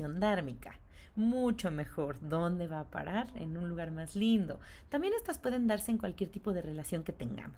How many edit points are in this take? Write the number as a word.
zero